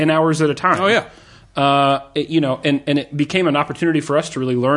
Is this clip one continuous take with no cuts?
yes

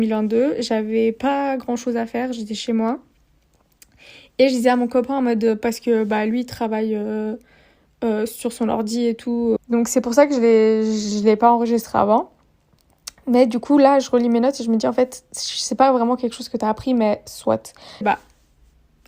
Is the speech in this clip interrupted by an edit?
yes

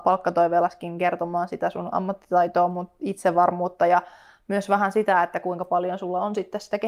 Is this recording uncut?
yes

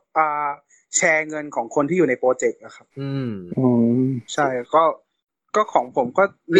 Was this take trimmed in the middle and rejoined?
yes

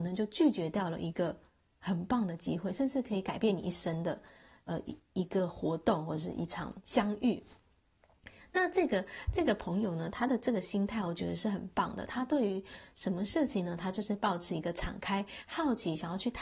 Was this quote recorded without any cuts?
yes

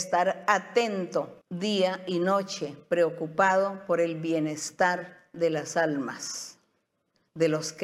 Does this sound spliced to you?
yes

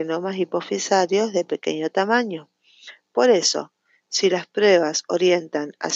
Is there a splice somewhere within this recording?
no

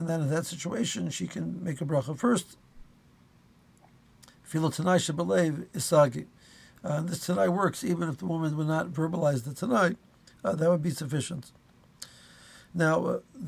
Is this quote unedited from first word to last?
yes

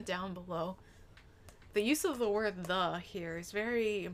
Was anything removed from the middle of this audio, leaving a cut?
no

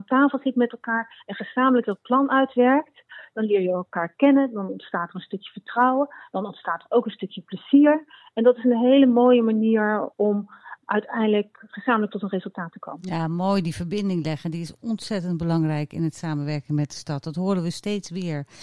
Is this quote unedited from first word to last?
yes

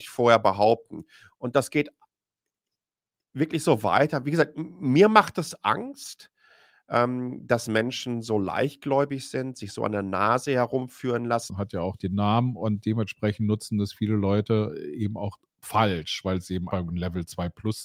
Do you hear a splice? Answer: yes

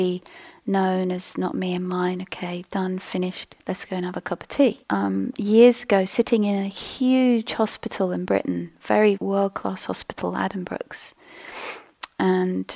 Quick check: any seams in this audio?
yes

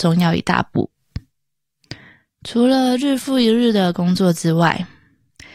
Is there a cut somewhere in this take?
no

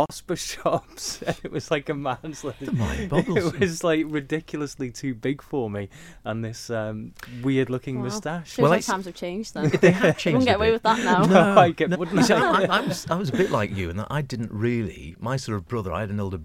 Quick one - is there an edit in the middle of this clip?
yes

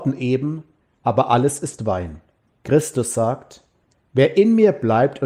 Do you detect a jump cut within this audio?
yes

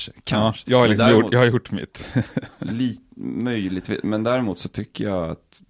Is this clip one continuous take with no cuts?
yes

